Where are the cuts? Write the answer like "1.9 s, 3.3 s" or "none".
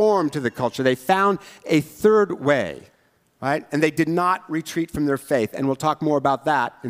none